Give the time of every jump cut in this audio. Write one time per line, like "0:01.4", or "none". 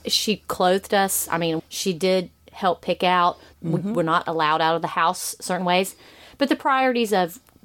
0:01.6
0:03.5